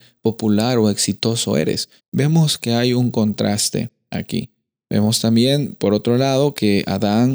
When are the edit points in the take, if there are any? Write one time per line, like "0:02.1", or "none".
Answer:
0:02.0